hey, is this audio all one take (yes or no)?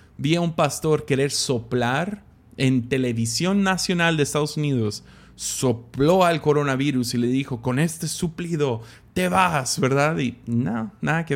yes